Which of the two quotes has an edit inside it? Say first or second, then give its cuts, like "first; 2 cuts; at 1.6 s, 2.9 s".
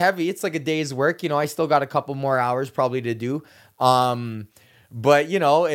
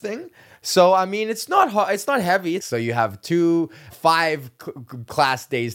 second; 2 cuts; at 2.6 s, 3.9 s